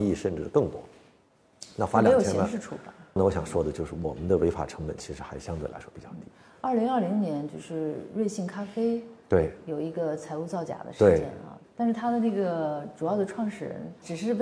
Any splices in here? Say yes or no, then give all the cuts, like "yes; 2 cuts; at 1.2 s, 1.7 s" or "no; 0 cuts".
yes; 1 cut; at 3.2 s